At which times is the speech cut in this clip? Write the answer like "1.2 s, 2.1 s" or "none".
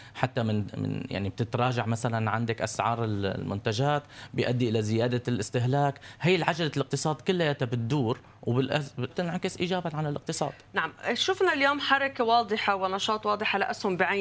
9.1 s

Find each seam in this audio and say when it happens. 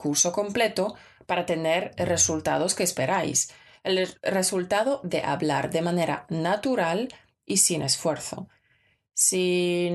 none

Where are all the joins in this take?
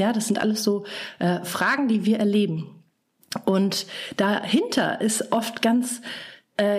none

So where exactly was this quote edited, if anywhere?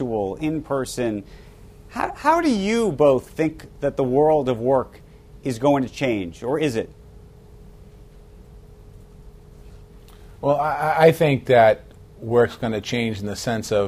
none

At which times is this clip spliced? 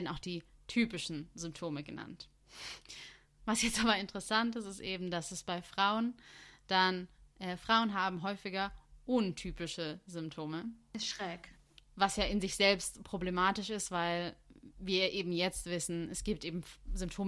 none

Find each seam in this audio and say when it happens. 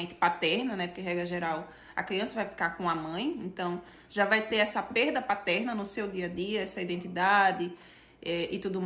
none

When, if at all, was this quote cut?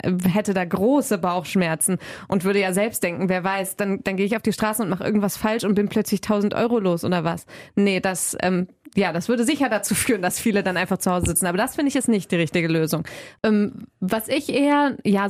none

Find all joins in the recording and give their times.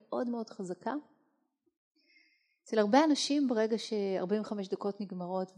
none

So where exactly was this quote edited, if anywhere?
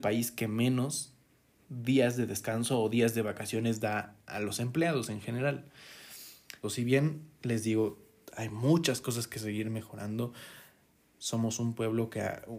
6.6 s

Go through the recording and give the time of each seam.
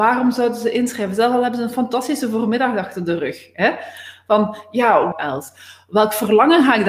5.1 s

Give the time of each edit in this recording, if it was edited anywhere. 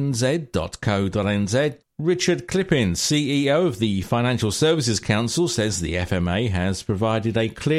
1.8 s

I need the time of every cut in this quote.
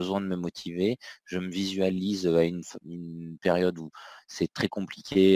none

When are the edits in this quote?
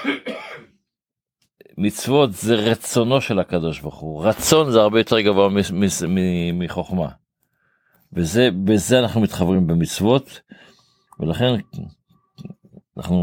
none

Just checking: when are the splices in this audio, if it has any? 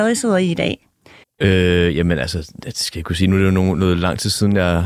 1.2 s

